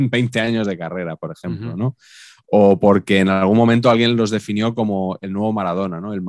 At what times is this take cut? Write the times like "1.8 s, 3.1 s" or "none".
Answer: none